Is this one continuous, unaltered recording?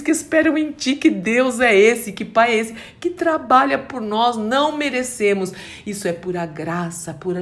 yes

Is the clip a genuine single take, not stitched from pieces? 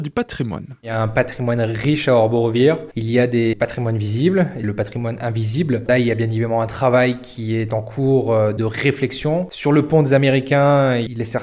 no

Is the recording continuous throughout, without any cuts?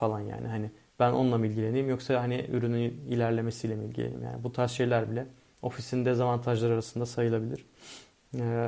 yes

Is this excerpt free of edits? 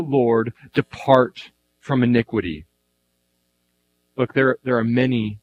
yes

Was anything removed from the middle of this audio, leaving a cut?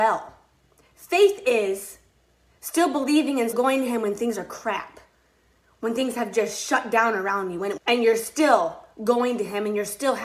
yes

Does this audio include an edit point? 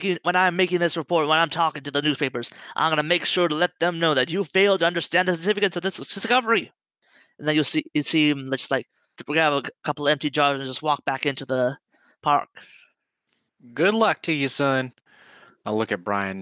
no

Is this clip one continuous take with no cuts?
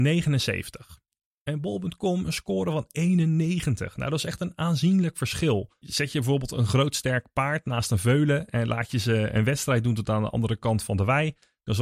no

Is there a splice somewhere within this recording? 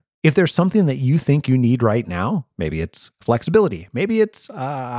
no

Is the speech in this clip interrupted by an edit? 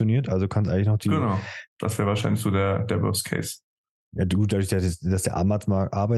yes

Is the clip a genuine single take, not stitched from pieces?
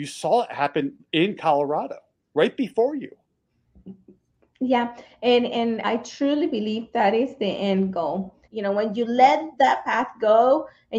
no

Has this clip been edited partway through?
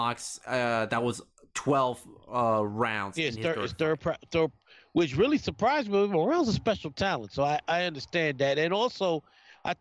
no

